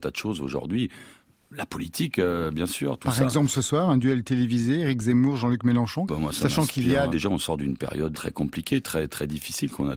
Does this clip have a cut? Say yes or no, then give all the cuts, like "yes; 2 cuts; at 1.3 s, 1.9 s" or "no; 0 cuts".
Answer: yes; 3 cuts; at 6.1 s, 7.1 s, 8.1 s